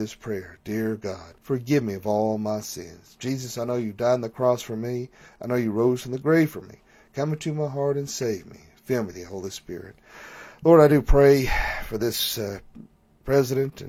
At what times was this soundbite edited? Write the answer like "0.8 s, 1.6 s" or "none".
1.4 s